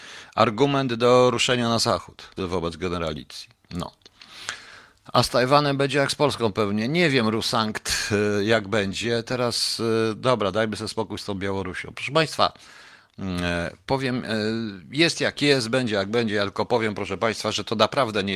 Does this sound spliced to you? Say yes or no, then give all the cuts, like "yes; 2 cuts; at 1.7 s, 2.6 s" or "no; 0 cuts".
yes; 1 cut; at 2.4 s